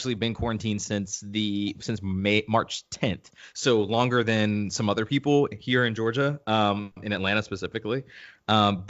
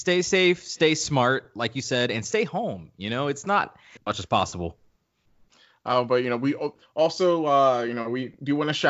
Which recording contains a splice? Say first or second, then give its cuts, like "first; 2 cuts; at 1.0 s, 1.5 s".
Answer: second; 1 cut; at 4.0 s